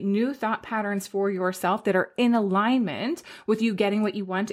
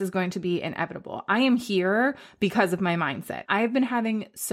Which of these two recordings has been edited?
second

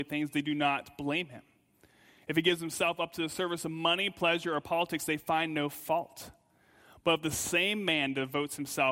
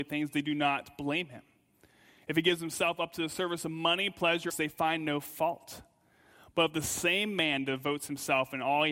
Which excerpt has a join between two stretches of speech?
second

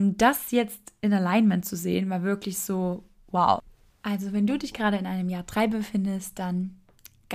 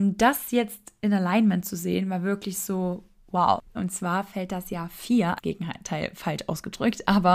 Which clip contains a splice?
second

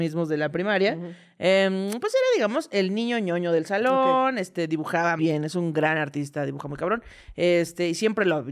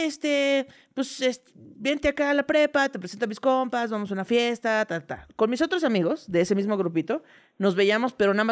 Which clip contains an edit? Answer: first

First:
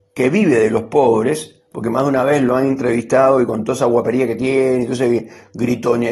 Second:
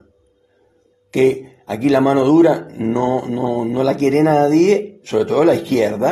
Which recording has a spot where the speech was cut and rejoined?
second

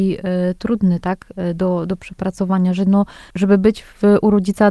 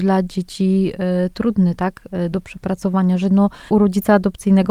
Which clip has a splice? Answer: second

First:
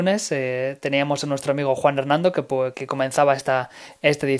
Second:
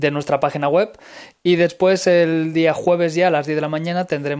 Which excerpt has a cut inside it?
first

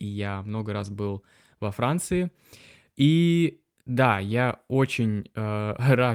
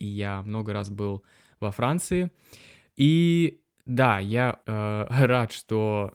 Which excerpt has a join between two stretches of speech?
second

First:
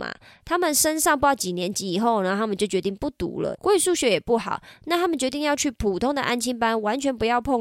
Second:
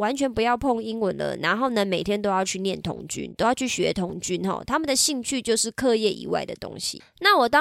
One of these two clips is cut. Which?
first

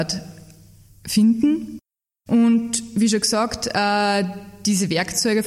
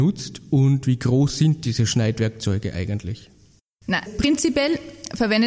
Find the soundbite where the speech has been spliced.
second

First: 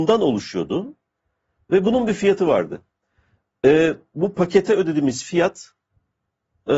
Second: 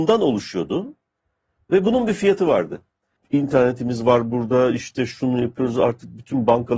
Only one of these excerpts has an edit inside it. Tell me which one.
second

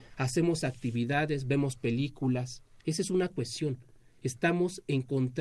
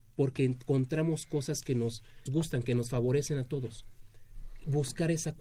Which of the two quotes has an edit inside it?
second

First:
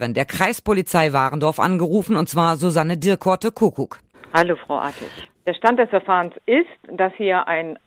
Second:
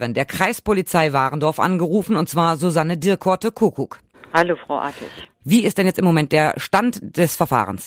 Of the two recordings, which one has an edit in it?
first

